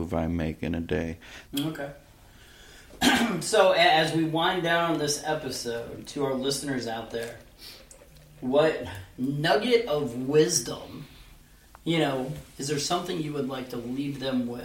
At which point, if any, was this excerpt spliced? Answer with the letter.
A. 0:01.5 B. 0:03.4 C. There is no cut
A